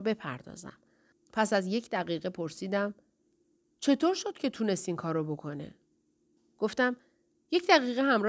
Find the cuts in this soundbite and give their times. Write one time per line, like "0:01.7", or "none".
0:01.1
0:06.4

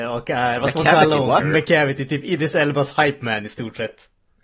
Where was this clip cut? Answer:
0:01.4

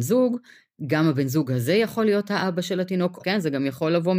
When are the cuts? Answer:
0:03.2

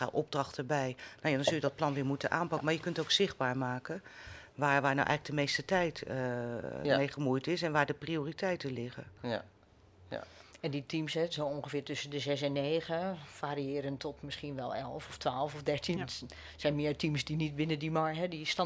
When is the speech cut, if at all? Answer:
0:15.9

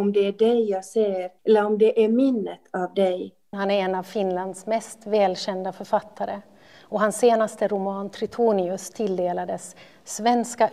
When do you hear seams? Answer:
0:01.4
0:03.5

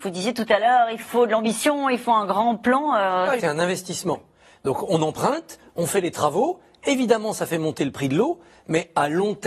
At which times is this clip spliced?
0:03.4

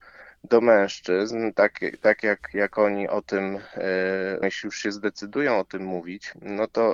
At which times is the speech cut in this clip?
0:04.4

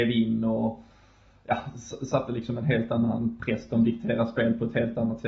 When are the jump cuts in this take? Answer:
none

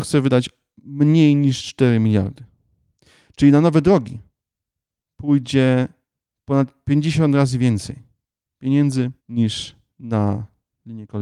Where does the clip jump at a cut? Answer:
0:09.2

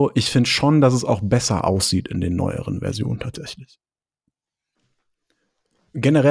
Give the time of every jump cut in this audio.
none

